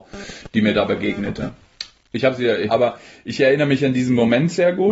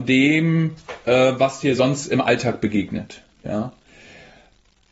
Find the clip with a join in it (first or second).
first